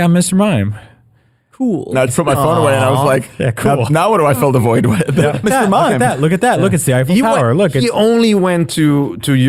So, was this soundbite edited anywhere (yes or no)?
yes